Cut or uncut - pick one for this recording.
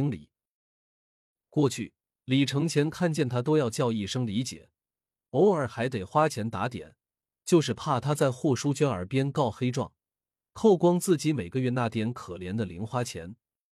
uncut